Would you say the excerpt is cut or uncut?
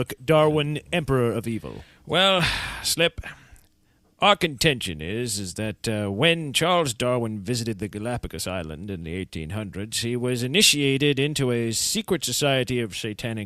uncut